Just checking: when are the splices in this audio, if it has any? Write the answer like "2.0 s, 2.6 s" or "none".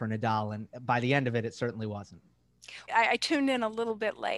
2.9 s